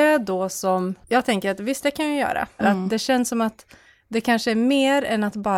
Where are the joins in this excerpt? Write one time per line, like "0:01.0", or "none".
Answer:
0:02.6

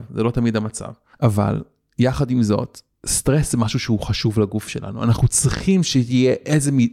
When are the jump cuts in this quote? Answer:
0:01.1

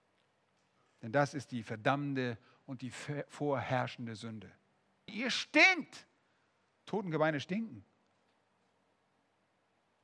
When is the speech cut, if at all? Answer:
0:05.1

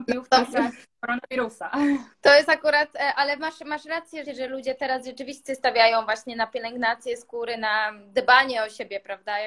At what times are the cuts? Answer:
0:02.1
0:04.3

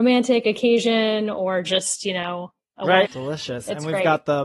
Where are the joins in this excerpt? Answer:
0:03.1

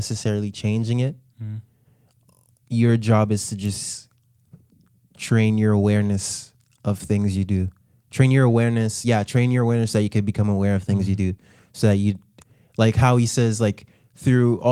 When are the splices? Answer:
none

